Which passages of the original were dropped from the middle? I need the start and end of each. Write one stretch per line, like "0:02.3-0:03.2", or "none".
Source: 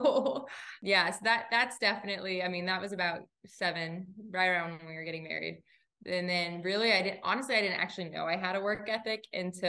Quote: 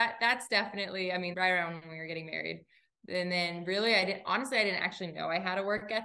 0:02.6-0:04.3

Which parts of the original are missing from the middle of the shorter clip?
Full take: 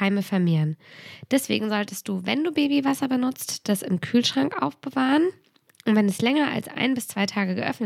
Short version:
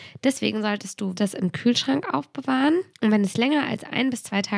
0:02.2-0:03.6
0:05.4-0:05.7

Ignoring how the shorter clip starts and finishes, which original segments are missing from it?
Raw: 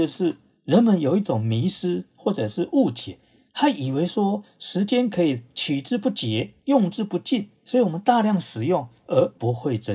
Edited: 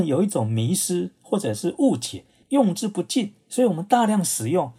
0:03.4-0:06.6

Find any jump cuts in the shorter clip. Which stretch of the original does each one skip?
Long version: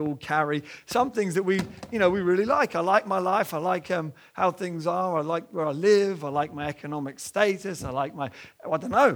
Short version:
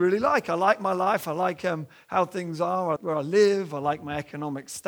0:05.2-0:05.5

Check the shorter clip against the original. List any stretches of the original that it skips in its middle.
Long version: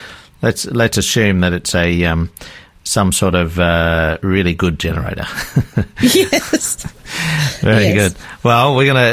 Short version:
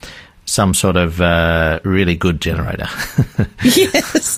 none

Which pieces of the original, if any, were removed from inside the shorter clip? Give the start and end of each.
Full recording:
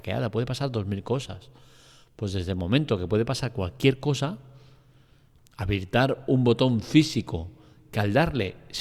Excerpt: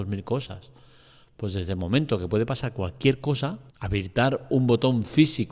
0:04.5-0:05.5

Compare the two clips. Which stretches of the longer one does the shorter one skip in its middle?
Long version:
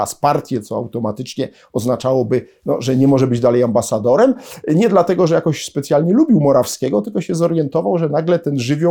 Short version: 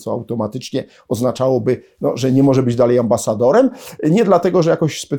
none

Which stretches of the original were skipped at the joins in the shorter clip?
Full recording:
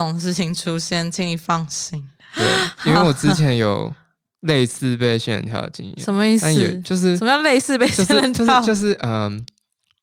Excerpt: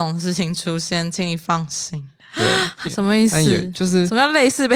0:02.8-0:05.9

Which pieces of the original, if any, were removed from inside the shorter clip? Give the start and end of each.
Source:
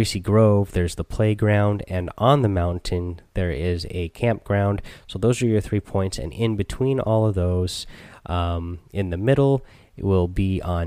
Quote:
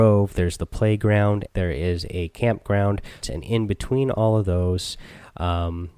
0:01.8-0:03.3
0:05.0-0:06.1

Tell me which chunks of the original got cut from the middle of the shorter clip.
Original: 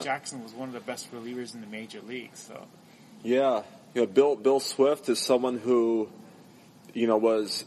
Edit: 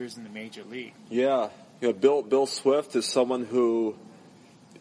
0:02.3-0:03.1

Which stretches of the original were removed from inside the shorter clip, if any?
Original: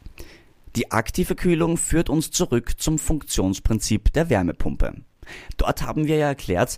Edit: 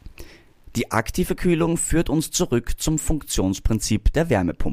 none

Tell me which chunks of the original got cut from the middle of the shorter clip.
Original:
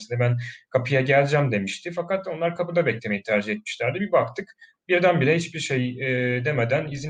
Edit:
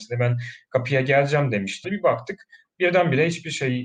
0:01.8-0:03.9

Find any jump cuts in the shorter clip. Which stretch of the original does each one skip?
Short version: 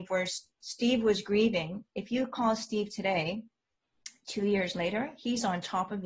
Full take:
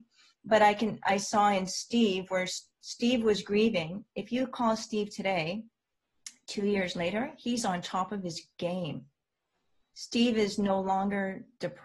none

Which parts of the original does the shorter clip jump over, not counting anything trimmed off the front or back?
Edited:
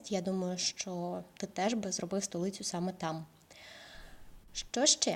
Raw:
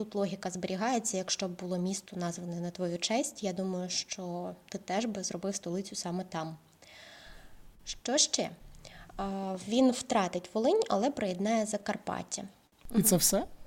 none

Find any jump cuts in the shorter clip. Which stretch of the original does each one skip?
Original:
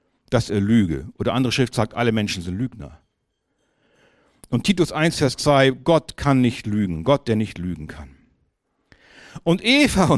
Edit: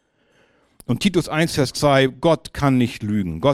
none

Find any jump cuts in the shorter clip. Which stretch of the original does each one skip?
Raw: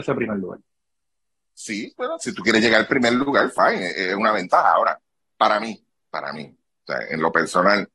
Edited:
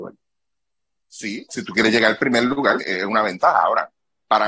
0:01.9-0:02.2
0:03.5-0:03.9

